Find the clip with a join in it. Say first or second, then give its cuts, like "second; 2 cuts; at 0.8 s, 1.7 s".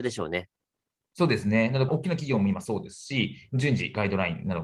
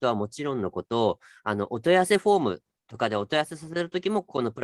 first; 1 cut; at 1.9 s